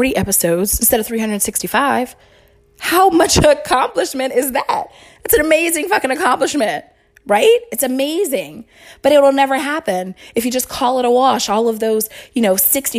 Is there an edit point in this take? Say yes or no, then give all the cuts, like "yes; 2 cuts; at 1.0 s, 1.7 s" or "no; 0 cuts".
no; 0 cuts